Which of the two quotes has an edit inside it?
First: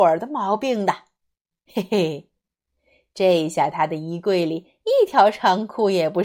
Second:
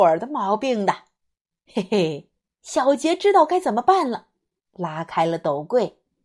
second; 2 cuts; at 2.6 s, 4.6 s

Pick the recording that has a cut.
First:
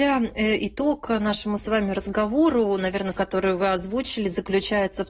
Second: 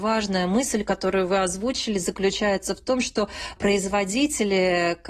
first; 1 cut; at 3.1 s

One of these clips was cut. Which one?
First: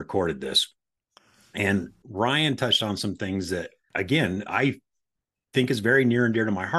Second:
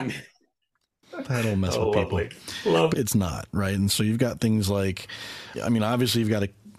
second; 2 cuts; at 2.9 s, 5.5 s

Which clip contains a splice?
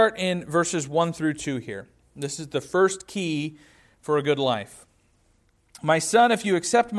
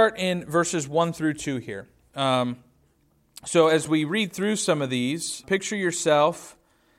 second; 2 cuts; at 2.1 s, 5.4 s

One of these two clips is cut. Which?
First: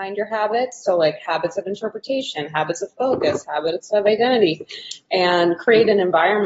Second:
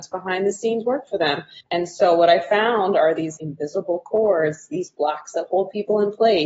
second; 2 cuts; at 1.6 s, 3.4 s

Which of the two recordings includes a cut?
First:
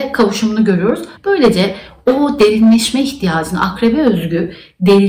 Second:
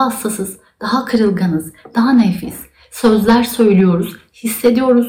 first; 1 cut; at 1.2 s

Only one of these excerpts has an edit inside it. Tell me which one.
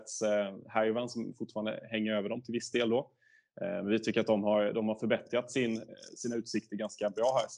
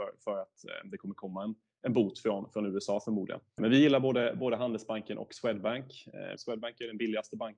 second; 2 cuts; at 3.6 s, 6.4 s

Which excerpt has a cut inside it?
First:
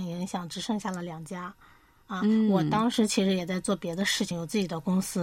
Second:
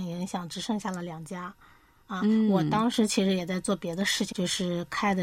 second; 1 cut; at 4.3 s

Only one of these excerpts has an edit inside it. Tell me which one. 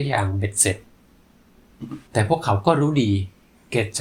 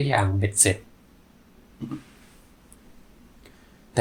first; 1 cut; at 2.1 s

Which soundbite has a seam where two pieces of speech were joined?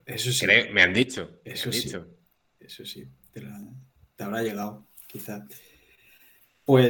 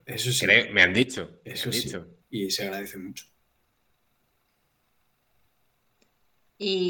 second; 1 cut; at 2.2 s

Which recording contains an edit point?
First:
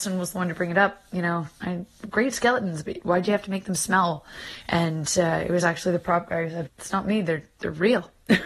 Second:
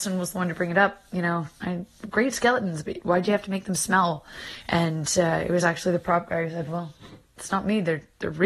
first; 1 cut; at 6.7 s

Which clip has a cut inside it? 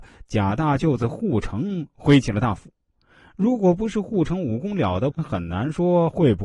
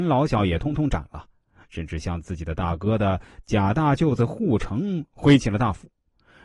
first; 1 cut; at 5.1 s

